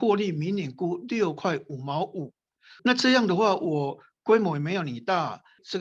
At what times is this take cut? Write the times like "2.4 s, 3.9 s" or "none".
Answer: 2.8 s